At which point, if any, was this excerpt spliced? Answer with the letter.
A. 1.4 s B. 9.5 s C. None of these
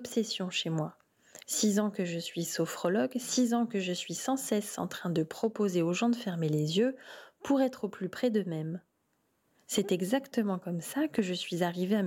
A